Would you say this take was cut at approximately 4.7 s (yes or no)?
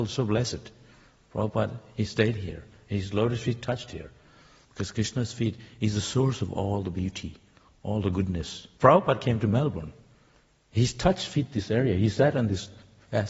yes